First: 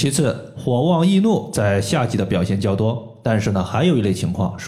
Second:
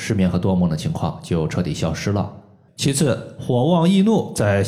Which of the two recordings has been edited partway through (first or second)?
second